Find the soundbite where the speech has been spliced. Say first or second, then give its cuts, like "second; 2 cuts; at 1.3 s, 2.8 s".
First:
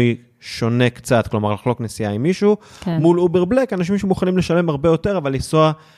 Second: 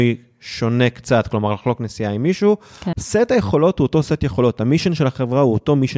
second; 1 cut; at 2.9 s